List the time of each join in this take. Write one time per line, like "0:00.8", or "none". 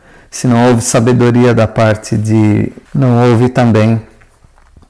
0:02.9